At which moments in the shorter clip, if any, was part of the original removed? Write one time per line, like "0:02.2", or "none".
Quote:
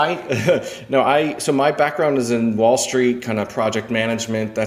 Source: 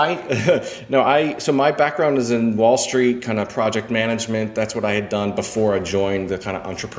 none